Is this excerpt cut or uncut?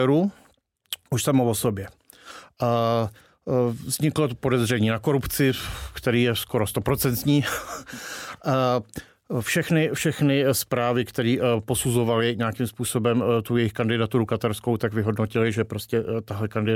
uncut